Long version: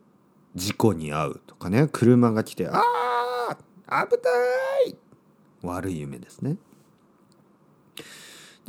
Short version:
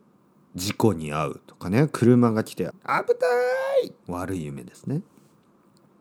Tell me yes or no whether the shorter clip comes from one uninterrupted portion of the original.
no